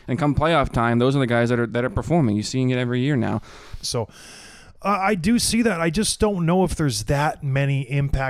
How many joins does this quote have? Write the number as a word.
one